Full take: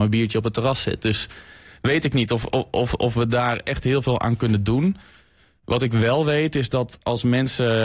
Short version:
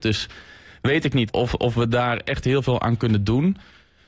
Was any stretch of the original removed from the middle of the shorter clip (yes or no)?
yes